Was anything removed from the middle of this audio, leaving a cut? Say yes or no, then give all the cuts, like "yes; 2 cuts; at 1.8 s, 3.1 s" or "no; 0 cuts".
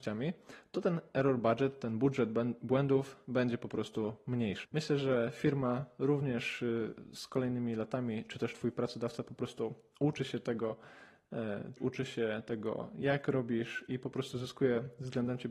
yes; 2 cuts; at 4.6 s, 11.8 s